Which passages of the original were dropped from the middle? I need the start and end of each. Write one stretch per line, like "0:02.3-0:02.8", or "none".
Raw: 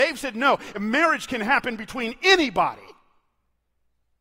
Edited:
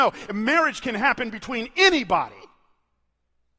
none

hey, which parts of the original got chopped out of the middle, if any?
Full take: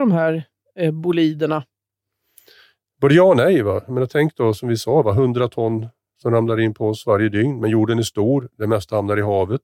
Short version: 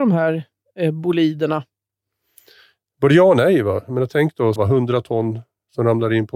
0:04.6-0:05.0

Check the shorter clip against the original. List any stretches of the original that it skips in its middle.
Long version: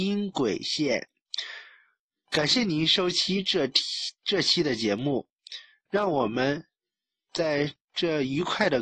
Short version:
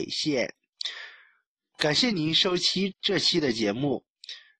0:03.4-0:04.1

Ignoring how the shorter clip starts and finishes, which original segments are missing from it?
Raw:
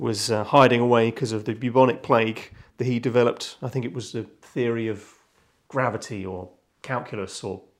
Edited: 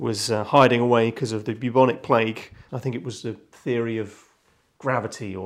0:02.7-0:03.6

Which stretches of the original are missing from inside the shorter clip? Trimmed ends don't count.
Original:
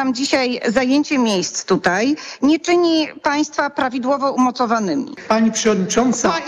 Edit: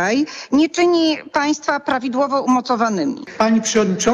none

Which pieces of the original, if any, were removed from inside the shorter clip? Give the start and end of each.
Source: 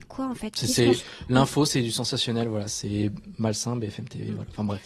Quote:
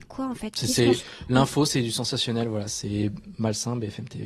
none

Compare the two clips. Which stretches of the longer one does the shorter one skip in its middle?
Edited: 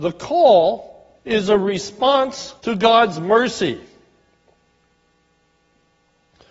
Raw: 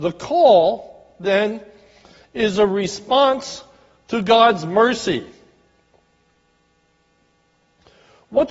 0:01.2-0:02.3
0:03.7-0:04.0

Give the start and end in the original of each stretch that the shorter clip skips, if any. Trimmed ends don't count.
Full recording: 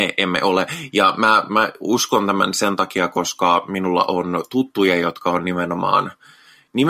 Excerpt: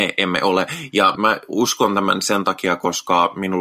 0:01.2-0:01.5

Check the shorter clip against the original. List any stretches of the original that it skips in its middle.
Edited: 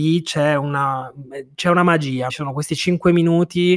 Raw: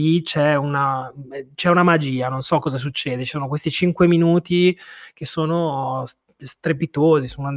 0:02.3-0:03.2

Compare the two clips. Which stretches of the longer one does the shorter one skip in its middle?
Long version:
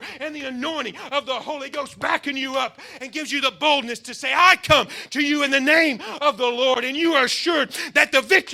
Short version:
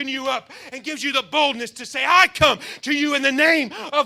none

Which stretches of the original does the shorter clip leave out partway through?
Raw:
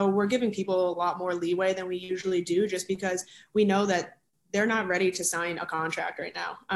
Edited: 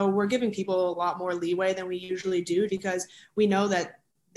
0:02.7-0:02.9

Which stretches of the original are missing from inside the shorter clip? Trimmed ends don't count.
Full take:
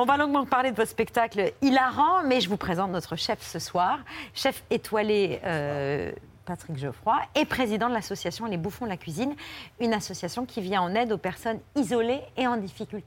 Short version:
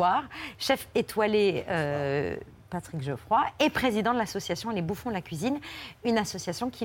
none

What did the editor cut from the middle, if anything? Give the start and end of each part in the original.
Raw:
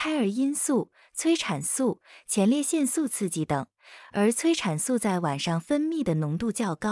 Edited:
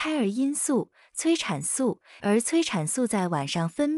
0:02.2-0:04.1

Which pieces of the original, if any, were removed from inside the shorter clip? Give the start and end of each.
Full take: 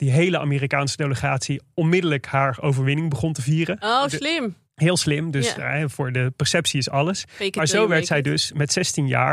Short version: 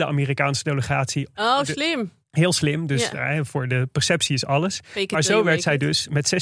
0:01.7-0:03.8

